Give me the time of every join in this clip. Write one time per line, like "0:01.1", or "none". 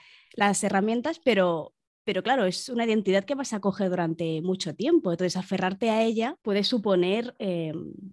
0:06.4